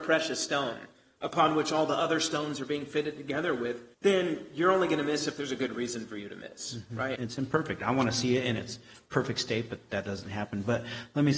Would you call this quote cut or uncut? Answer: cut